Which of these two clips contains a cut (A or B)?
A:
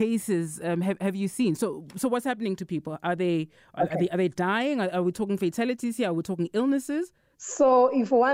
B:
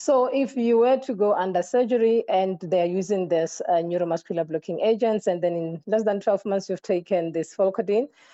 A